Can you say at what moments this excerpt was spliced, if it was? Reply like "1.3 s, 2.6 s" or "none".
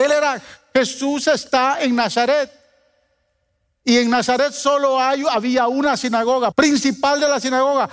6.5 s